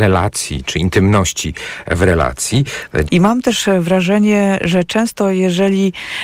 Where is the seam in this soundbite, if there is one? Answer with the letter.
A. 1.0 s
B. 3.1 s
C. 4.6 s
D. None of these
B